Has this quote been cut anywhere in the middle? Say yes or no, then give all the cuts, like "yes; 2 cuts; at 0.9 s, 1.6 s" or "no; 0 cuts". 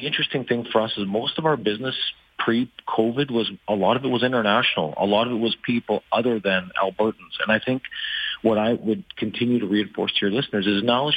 no; 0 cuts